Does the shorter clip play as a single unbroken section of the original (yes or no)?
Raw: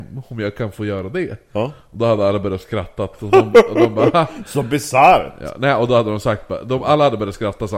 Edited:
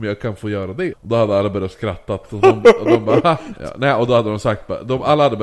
no